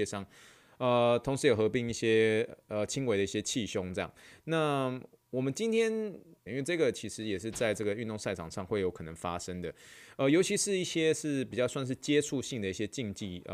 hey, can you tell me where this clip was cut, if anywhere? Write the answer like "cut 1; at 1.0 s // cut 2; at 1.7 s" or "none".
cut 1; at 6.5 s